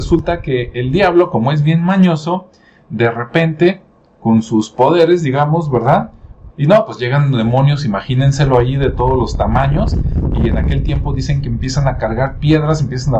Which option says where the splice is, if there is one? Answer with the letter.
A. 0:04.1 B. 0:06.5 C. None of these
B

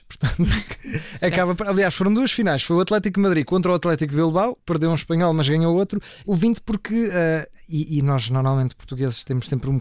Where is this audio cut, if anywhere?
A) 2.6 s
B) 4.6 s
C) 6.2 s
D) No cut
C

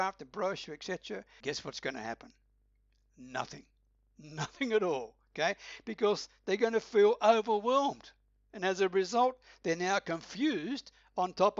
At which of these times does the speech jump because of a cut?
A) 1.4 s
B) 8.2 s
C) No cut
A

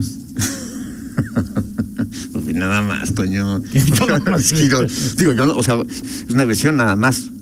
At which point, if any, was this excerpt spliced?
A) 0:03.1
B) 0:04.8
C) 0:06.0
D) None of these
C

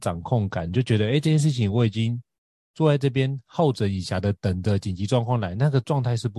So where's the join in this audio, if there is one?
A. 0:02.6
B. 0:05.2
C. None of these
C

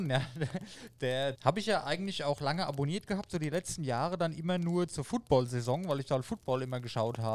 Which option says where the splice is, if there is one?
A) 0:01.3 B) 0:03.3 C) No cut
A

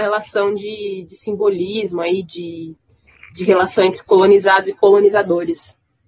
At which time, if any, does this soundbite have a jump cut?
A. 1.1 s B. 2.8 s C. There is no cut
C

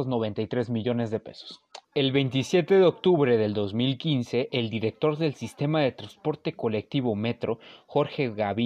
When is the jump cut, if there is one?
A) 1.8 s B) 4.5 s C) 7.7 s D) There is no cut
A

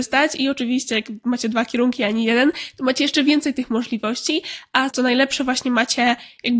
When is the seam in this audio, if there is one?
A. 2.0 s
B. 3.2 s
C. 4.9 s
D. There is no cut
C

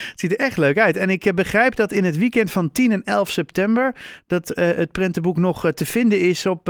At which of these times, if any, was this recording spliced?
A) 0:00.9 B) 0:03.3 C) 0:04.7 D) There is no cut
D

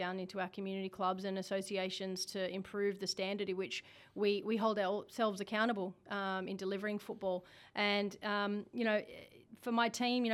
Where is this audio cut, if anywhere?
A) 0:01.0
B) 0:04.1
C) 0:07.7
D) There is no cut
D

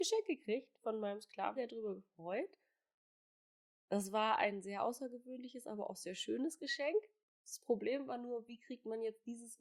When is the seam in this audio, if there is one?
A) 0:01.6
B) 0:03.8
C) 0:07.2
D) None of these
A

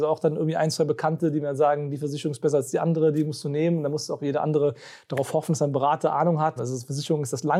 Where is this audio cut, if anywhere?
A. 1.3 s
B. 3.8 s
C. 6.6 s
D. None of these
C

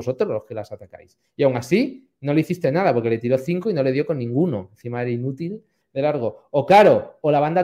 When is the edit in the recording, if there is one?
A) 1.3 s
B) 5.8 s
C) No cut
B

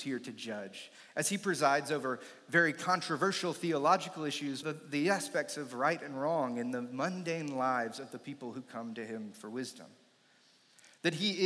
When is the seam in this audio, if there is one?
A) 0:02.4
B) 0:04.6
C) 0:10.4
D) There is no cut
B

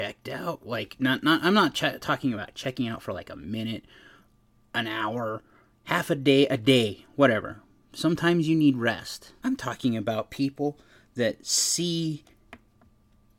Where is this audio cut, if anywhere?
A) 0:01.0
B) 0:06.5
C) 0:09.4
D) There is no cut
C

